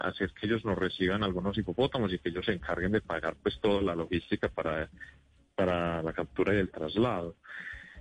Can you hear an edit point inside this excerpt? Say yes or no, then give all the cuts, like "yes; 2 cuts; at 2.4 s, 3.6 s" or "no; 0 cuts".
no; 0 cuts